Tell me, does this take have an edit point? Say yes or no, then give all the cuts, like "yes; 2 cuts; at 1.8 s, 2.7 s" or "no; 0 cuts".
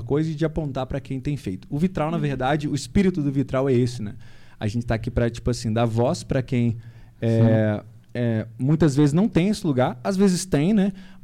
no; 0 cuts